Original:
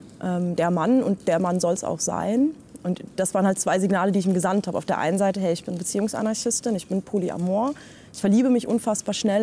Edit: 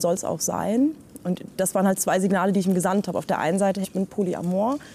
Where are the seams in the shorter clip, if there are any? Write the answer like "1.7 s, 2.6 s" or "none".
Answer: 3.8 s